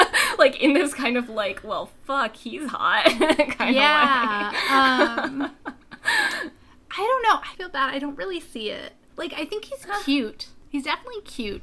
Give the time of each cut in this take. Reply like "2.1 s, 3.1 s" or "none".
none